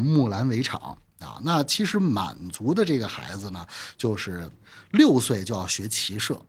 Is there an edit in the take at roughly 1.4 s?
no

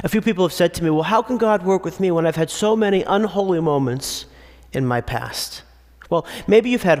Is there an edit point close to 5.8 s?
no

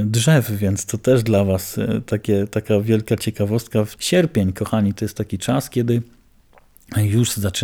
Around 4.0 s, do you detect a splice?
yes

